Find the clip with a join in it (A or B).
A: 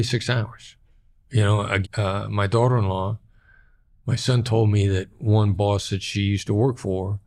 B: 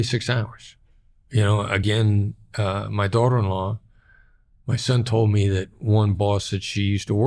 A